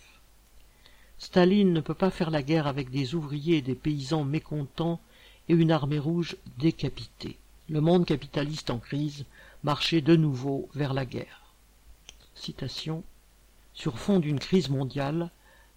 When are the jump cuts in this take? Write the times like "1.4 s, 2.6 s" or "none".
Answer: 7.6 s, 13.6 s